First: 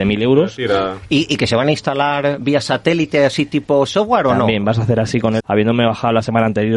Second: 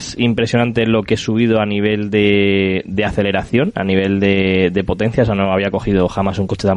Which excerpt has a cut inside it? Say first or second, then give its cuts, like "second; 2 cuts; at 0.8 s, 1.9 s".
first; 1 cut; at 5.4 s